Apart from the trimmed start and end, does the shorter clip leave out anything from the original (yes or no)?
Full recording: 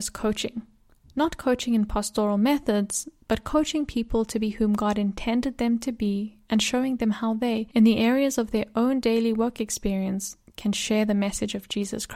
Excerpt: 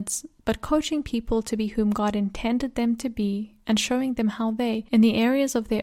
no